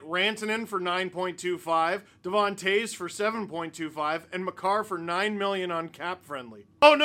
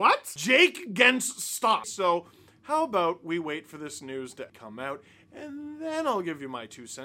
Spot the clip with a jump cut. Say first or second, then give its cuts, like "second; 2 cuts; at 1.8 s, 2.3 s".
second; 2 cuts; at 1.8 s, 4.5 s